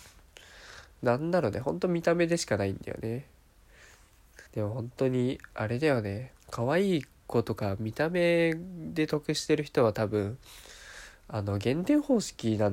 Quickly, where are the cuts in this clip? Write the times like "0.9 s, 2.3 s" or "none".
4.5 s, 6.4 s